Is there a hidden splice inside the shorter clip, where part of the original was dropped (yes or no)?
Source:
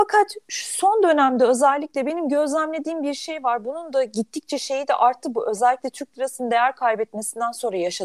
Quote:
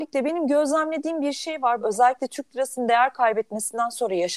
yes